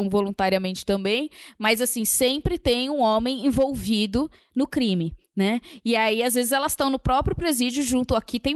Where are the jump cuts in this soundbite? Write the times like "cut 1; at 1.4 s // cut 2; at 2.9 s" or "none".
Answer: none